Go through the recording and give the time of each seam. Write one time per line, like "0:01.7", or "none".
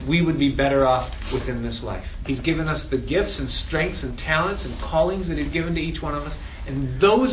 0:02.2